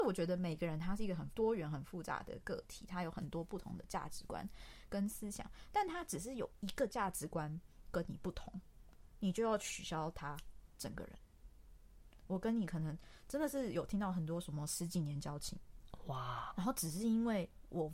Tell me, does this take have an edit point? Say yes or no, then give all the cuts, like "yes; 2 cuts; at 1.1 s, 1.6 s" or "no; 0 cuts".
yes; 2 cuts; at 12.2 s, 16.5 s